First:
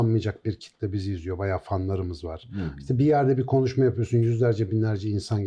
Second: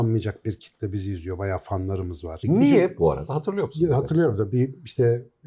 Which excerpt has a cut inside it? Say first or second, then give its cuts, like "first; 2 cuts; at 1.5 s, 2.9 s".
second; 1 cut; at 2.4 s